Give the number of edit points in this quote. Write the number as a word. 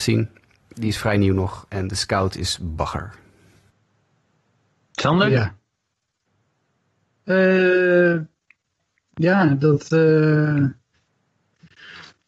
zero